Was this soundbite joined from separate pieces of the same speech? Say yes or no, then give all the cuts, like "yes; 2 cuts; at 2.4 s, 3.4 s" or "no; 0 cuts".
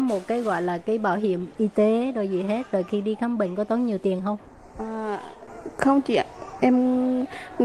yes; 1 cut; at 6.6 s